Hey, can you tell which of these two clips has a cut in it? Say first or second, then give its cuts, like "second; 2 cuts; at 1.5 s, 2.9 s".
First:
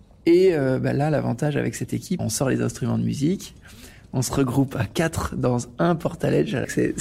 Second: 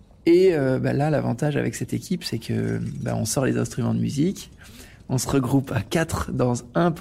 first; 1 cut; at 2.2 s